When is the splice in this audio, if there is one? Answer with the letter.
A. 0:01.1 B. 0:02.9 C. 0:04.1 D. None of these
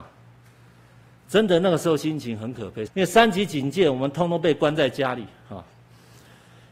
B